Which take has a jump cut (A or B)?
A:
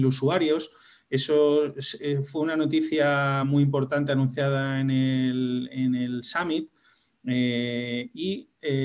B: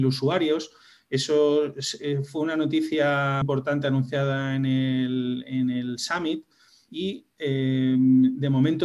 B